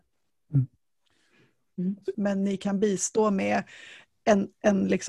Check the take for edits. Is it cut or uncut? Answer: cut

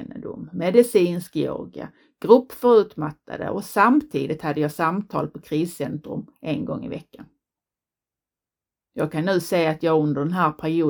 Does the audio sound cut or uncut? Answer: uncut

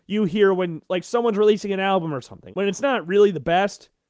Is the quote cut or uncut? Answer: cut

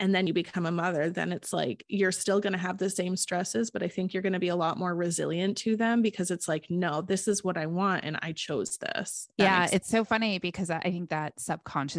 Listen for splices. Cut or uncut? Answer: uncut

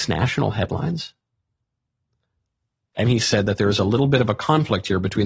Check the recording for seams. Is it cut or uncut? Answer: cut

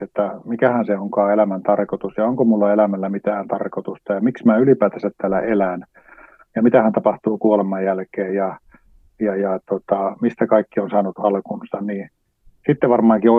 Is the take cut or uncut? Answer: uncut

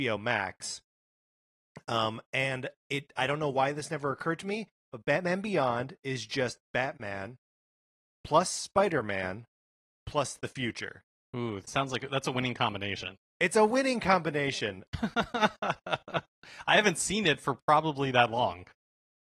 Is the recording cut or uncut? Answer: cut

